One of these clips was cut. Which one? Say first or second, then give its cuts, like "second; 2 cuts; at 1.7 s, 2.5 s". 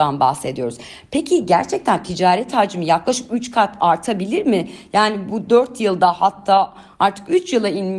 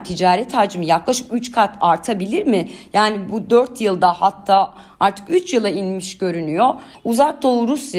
second; 1 cut; at 6.9 s